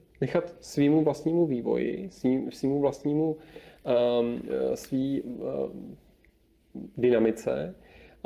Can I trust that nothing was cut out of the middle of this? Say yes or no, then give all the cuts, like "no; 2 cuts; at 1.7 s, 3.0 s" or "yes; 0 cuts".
yes; 0 cuts